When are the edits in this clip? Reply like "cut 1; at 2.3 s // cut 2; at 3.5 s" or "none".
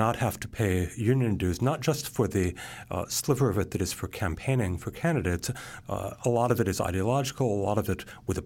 cut 1; at 5.8 s